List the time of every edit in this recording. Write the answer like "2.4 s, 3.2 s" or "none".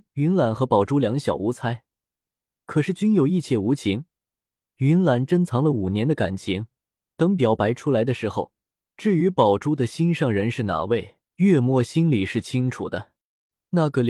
8.8 s, 11.3 s